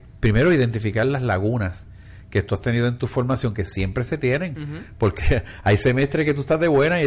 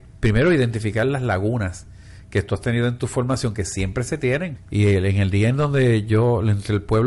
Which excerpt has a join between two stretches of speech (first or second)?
second